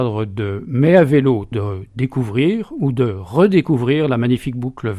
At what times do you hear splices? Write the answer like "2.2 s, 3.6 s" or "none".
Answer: 1.5 s